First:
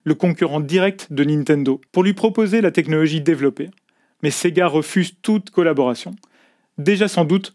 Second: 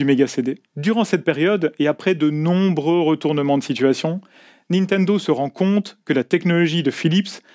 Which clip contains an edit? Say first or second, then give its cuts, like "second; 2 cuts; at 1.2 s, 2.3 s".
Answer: first; 1 cut; at 1.9 s